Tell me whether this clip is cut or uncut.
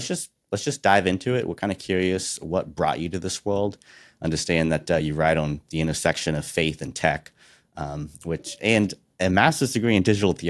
uncut